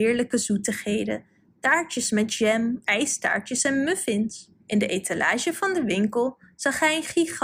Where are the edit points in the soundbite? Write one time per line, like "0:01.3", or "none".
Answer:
0:02.8
0:04.6